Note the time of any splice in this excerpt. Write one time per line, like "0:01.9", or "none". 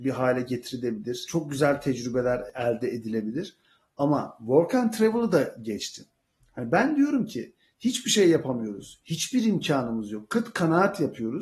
none